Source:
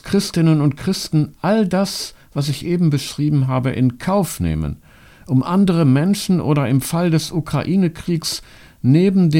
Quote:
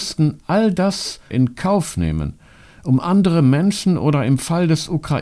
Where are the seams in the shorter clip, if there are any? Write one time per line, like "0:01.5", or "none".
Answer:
0:01.3